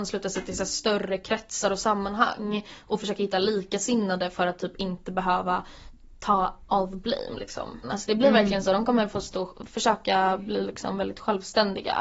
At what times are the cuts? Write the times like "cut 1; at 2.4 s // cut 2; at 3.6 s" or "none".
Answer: cut 1; at 7.8 s